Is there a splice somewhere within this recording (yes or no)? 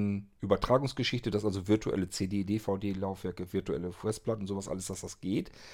no